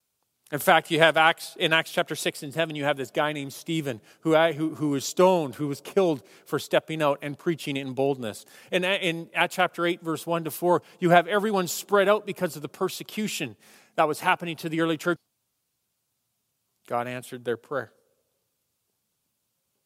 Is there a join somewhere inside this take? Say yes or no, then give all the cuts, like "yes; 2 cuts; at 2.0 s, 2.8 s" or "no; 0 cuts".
yes; 1 cut; at 15.2 s